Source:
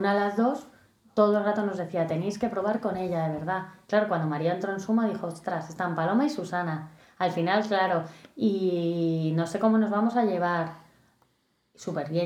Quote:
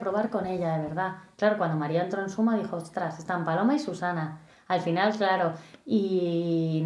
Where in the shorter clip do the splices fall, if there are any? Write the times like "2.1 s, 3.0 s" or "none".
none